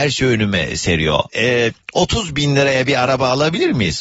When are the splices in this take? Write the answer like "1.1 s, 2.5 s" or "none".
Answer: 1.3 s